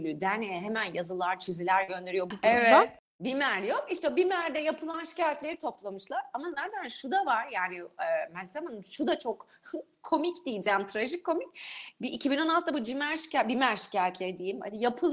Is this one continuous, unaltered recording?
no; 1 cut; at 2.3 s

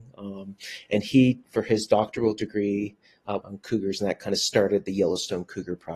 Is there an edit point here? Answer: yes; 1 cut; at 3.4 s

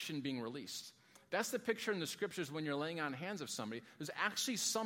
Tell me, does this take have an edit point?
no; 0 cuts

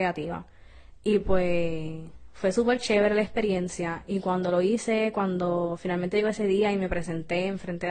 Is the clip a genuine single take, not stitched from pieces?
yes; 0 cuts

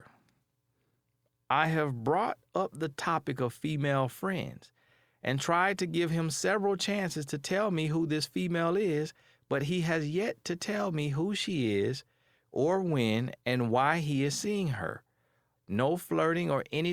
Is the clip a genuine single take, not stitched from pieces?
no; 1 cut; at 15.6 s

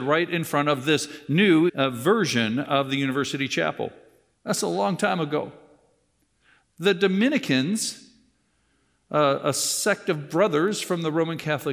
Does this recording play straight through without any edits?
no; 2 cuts; at 1.7 s, 4.3 s

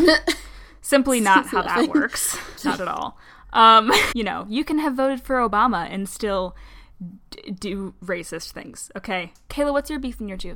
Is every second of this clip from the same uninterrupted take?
no; 3 cuts; at 2.6 s, 4.1 s, 9.5 s

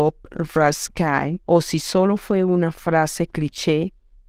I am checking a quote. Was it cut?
yes; 1 cut; at 1.4 s

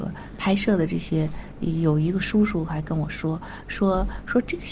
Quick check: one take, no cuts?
yes; 0 cuts

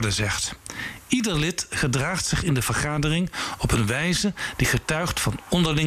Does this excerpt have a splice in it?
no; 0 cuts

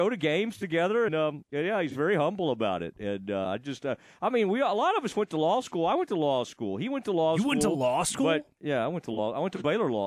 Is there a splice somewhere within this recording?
yes; 2 cuts; at 1.1 s, 8.6 s

